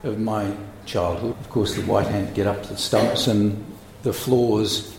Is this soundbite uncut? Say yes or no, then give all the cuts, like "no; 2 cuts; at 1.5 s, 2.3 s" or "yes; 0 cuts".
no; 1 cut; at 1.3 s